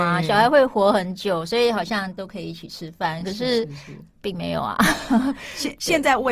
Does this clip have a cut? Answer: no; 0 cuts

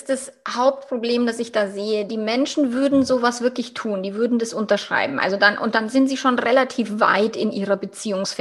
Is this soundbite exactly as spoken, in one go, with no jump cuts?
yes; 0 cuts

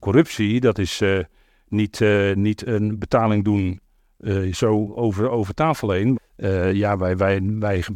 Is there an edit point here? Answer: yes; 1 cut; at 6.1 s

